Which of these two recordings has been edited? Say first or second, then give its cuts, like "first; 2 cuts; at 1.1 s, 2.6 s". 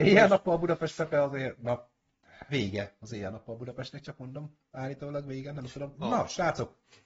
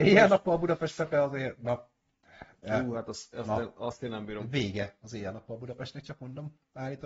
first; 2 cuts; at 2.5 s, 5.9 s